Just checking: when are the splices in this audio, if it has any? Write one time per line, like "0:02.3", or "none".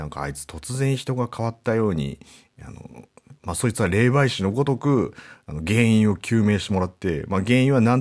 0:03.4